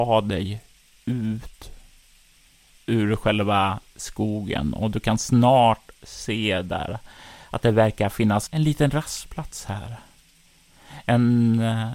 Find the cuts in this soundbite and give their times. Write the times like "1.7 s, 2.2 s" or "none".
none